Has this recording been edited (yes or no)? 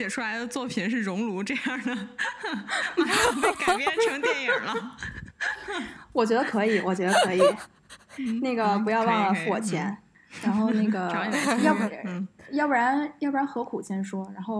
no